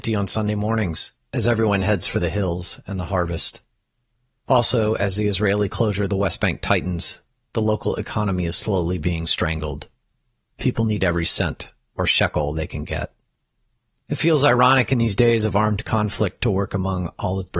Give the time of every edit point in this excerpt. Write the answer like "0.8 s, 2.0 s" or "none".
4.4 s